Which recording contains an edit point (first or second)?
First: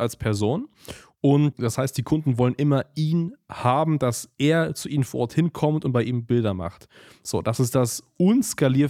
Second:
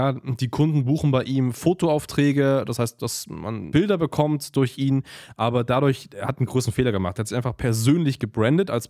second